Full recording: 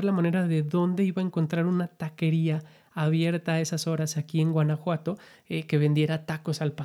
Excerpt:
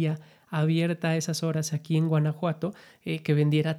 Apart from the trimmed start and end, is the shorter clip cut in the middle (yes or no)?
no